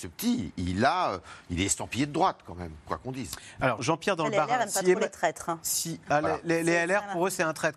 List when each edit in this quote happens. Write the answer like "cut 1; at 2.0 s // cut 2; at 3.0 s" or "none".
cut 1; at 3.8 s